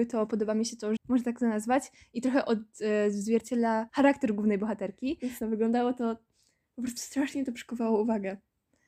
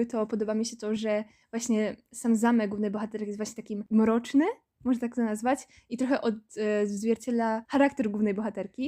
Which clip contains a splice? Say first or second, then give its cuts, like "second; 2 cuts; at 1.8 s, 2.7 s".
first; 2 cuts; at 1.0 s, 5.4 s